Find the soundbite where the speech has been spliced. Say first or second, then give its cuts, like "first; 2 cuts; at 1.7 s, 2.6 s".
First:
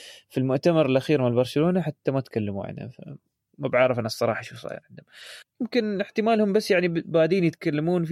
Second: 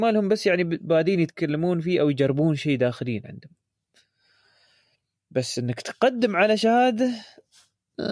first; 1 cut; at 5.4 s